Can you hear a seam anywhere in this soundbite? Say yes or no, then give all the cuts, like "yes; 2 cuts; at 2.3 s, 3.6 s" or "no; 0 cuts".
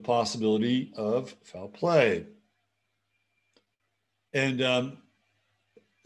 yes; 1 cut; at 4.3 s